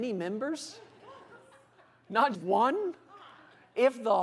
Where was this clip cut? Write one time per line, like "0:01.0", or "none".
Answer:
0:02.3